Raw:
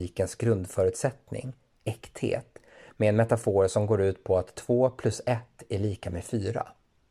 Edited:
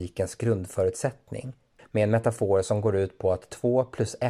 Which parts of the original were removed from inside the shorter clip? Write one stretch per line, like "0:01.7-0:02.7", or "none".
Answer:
0:01.8-0:02.8